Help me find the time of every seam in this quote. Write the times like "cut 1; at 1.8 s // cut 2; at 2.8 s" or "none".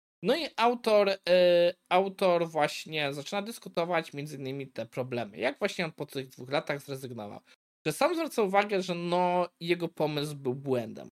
none